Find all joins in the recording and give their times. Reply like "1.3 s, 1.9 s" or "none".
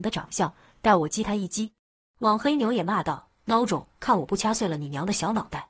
2.0 s, 4.0 s